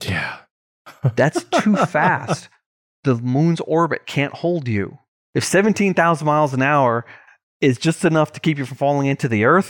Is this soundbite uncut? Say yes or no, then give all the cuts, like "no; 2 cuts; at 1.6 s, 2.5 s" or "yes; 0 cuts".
yes; 0 cuts